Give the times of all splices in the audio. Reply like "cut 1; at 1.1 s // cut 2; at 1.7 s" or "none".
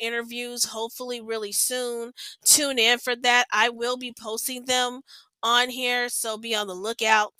none